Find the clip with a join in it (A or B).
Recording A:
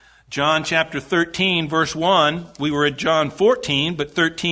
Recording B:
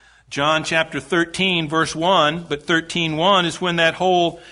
B